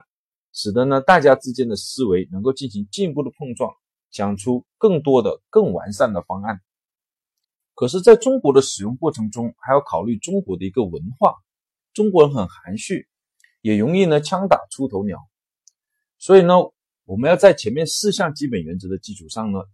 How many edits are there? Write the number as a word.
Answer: one